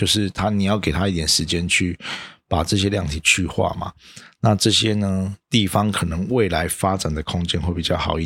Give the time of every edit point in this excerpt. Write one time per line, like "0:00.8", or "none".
none